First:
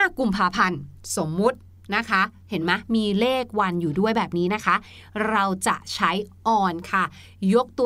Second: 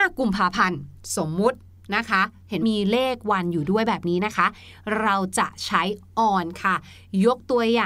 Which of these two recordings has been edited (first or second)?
second